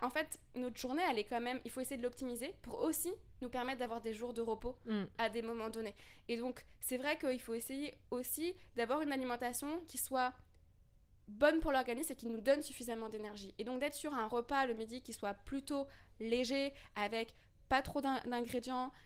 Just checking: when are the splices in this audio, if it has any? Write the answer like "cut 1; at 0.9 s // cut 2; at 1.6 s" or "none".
none